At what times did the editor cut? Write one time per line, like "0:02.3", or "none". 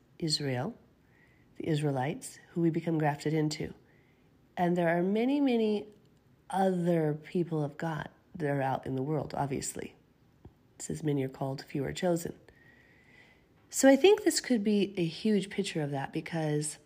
none